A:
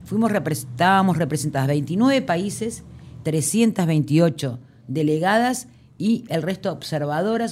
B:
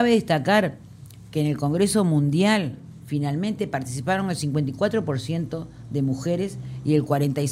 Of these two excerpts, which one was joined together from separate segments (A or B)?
A